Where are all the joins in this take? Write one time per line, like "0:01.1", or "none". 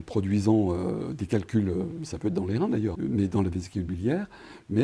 0:02.9

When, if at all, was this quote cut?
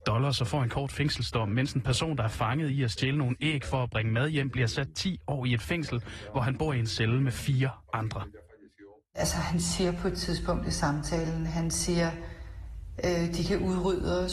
none

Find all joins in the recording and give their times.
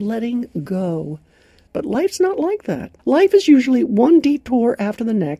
0:01.7
0:03.0

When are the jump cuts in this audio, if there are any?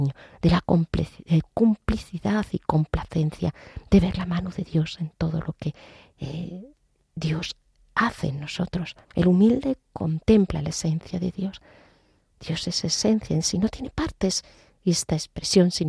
0:09.0

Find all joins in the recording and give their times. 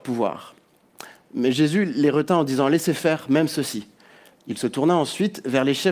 0:01.3
0:04.4

